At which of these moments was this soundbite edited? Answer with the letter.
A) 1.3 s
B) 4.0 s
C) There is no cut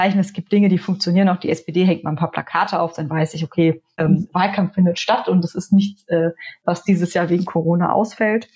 B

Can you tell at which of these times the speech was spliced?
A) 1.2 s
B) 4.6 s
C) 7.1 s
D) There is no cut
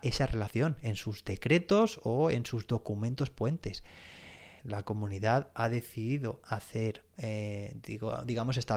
B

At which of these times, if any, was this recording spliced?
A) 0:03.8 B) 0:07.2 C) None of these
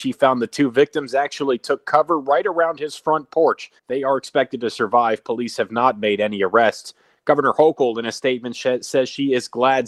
A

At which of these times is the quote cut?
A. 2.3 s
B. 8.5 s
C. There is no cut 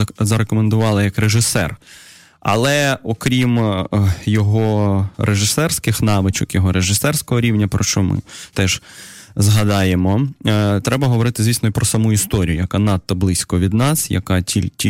B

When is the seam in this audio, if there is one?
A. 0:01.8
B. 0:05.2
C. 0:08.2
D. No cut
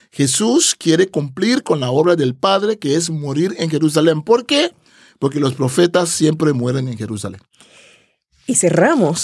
D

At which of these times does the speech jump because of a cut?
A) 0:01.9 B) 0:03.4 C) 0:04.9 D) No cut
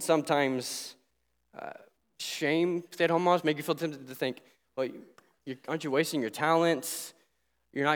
D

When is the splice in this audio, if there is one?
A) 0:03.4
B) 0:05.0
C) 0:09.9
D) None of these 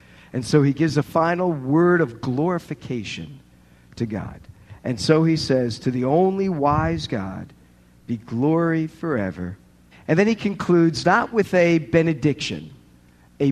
C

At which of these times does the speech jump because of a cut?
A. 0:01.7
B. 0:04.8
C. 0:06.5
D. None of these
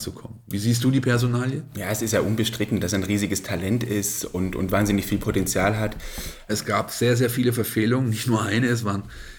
C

